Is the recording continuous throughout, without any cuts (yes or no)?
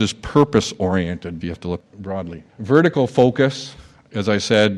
no